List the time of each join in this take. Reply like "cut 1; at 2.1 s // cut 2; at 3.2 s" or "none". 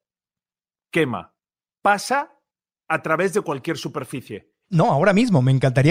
cut 1; at 4.7 s